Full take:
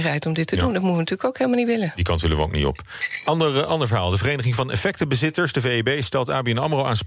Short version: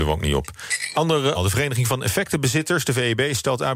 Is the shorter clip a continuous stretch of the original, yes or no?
no